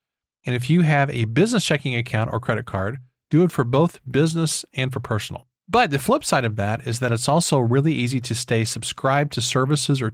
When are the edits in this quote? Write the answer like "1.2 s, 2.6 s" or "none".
5.6 s